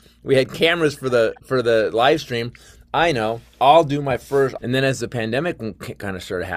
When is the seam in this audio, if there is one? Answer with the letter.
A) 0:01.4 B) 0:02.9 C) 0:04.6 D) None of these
C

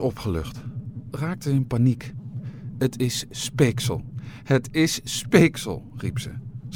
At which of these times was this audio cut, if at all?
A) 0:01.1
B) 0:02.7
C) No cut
A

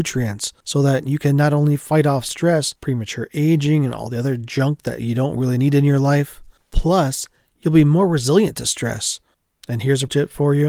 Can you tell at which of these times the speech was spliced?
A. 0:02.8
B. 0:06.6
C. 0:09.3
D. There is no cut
A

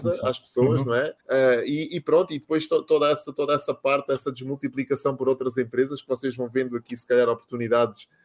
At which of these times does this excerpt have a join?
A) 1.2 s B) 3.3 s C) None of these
A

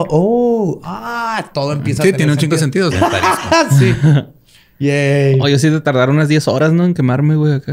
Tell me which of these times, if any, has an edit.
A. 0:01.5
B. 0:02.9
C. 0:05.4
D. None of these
B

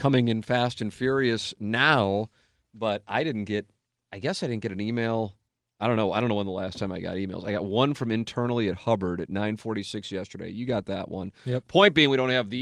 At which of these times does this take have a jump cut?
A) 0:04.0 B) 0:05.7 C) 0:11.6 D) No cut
D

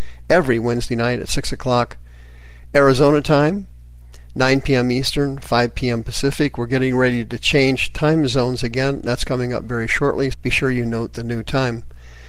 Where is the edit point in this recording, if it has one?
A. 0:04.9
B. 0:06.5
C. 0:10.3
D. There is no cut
C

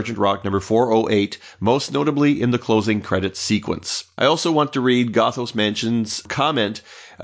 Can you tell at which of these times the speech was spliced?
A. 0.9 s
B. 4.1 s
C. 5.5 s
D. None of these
D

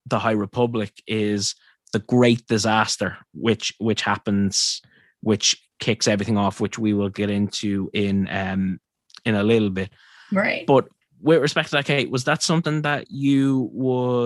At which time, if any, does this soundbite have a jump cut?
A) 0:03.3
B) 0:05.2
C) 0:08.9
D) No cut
D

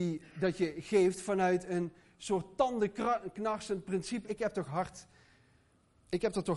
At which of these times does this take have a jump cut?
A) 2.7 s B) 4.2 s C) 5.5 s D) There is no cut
B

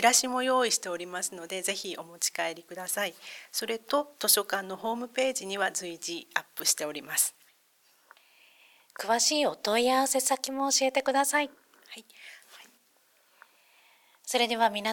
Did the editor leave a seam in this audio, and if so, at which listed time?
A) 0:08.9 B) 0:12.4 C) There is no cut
B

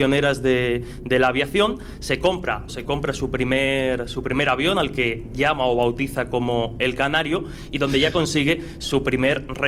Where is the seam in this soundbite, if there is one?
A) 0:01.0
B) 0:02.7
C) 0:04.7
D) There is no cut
B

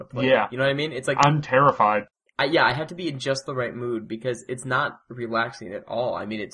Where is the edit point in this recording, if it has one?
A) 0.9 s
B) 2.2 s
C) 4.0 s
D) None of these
D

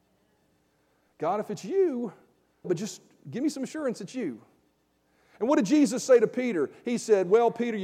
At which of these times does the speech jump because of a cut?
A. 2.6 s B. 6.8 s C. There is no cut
A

